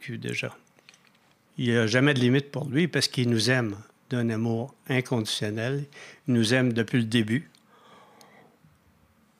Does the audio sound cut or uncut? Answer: cut